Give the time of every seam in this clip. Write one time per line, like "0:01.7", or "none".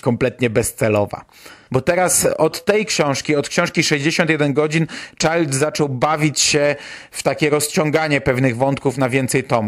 0:01.7